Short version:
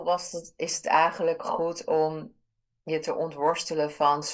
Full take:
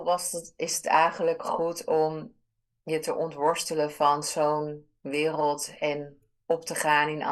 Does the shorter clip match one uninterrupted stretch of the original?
yes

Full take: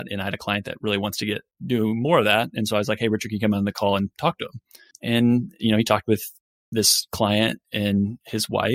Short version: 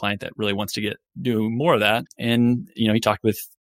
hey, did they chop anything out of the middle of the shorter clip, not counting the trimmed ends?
yes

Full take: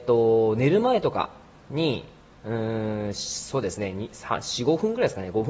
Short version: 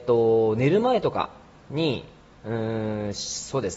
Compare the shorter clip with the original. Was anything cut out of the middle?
no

